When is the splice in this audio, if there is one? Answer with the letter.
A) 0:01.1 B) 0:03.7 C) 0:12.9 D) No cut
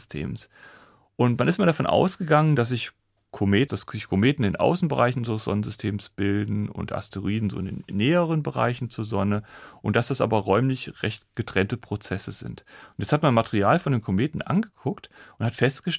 B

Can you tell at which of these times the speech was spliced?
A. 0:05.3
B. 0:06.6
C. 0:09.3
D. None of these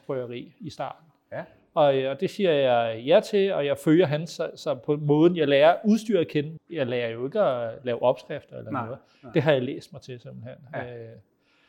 B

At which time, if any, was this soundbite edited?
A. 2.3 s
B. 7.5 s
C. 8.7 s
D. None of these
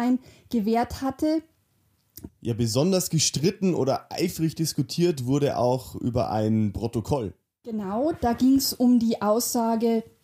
A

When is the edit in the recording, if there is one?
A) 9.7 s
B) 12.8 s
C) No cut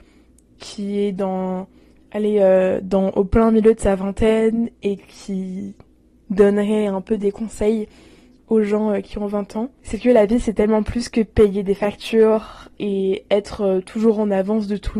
B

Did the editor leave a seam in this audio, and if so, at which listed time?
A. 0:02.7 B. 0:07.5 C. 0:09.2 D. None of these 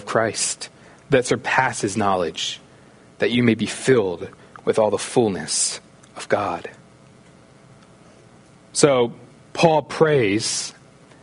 D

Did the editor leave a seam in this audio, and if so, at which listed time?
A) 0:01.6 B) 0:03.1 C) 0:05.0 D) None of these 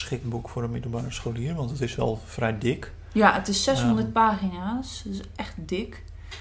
D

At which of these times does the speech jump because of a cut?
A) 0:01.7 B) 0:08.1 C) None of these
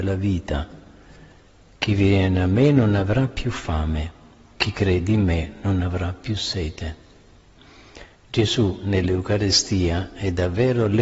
B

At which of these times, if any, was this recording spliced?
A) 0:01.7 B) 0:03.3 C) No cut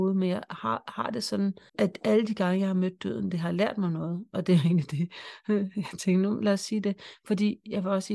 A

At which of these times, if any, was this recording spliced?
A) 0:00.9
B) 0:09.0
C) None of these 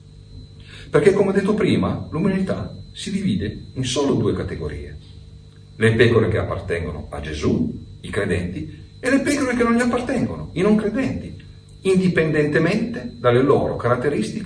C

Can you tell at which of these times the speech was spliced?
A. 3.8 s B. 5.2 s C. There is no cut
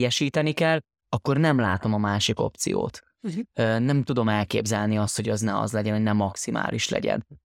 C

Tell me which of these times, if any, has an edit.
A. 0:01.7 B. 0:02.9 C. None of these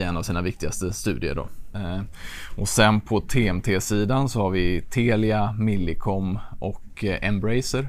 A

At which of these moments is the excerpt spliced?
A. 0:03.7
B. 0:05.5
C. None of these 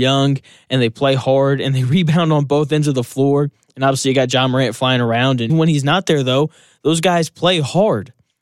B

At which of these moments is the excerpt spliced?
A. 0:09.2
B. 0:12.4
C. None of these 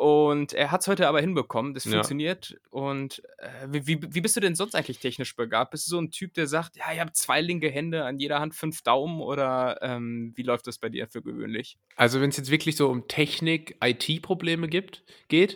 C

